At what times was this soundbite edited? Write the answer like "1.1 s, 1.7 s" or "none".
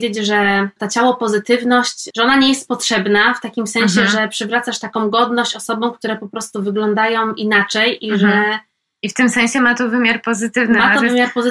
none